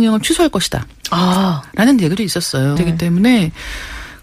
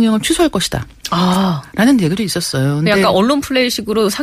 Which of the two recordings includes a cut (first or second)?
first